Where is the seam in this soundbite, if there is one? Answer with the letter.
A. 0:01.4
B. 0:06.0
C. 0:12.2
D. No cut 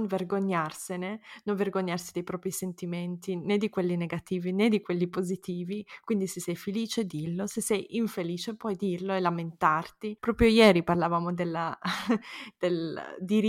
D